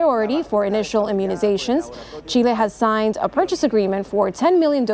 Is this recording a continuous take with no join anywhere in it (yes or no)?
yes